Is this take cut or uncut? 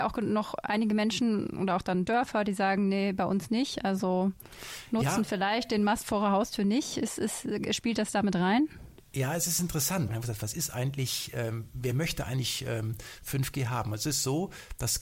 cut